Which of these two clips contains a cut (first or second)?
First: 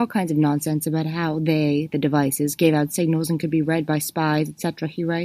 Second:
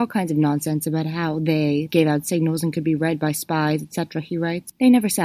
second